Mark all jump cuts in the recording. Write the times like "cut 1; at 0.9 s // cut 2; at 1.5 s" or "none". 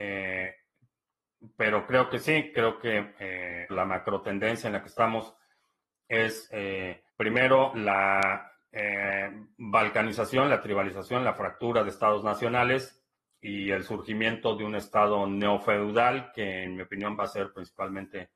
cut 1; at 3.7 s // cut 2; at 7.1 s